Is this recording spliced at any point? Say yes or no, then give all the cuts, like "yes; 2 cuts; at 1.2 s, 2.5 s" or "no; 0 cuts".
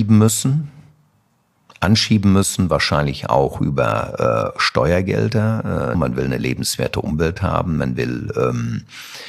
yes; 1 cut; at 5.9 s